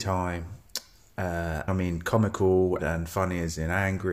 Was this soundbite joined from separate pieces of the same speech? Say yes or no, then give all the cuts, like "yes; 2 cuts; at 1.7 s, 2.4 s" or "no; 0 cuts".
yes; 2 cuts; at 1.7 s, 2.8 s